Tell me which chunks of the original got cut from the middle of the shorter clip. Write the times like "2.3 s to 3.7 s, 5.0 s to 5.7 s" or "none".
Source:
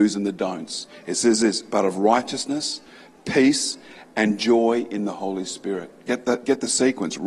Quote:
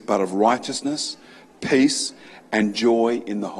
none